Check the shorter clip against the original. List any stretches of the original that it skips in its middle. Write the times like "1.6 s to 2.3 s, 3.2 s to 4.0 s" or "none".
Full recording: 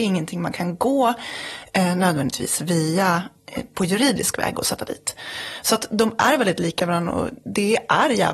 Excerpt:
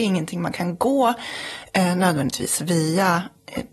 none